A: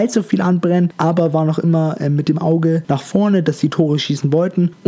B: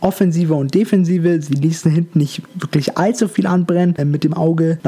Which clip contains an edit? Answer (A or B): B